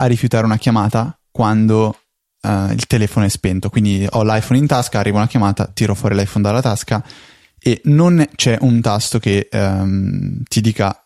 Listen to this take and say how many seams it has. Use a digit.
0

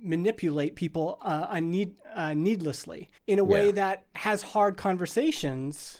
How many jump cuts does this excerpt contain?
1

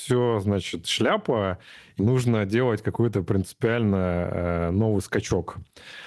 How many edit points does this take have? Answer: 0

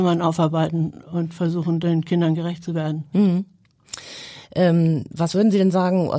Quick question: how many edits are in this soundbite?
1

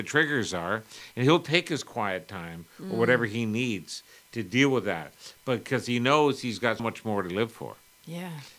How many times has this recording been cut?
1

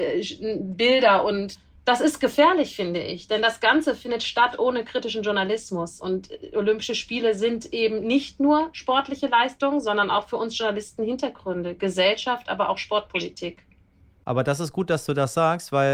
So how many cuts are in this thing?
0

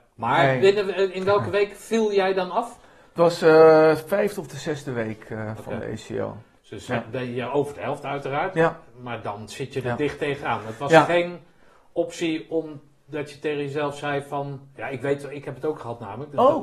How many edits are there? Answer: 0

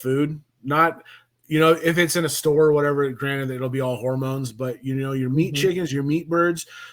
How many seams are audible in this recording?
0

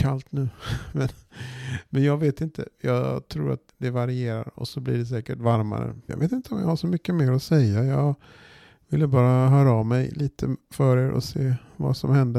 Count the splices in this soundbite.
2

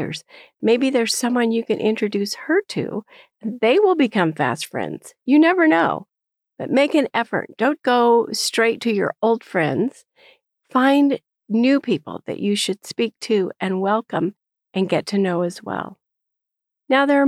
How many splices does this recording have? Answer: 1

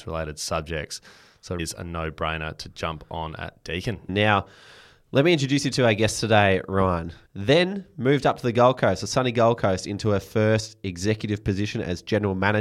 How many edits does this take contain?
3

